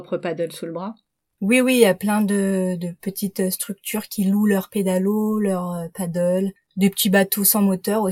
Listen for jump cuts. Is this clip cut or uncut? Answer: uncut